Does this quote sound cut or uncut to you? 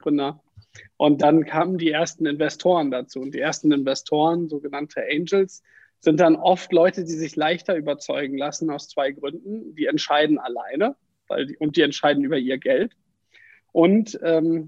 uncut